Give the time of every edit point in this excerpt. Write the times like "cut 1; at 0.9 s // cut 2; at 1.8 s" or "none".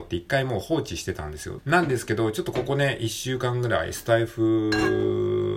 cut 1; at 1.6 s